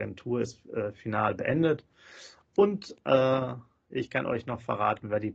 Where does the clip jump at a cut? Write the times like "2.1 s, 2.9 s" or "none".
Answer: none